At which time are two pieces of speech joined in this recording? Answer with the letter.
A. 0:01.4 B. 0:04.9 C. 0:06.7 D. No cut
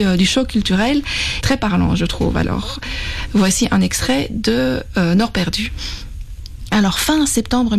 A